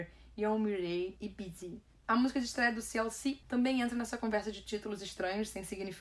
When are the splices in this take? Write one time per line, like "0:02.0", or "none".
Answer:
0:01.9
0:03.4